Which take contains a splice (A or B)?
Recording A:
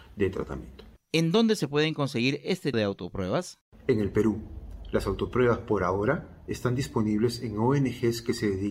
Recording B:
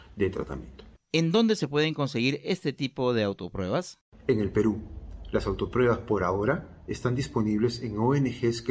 A